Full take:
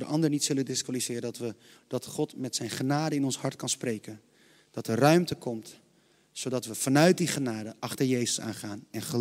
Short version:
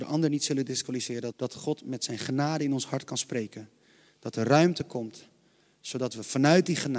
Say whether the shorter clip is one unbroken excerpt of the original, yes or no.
no